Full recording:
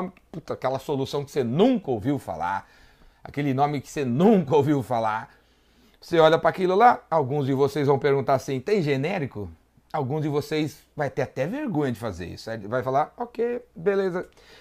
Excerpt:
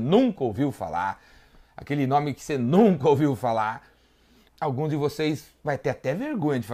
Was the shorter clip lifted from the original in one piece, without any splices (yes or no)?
no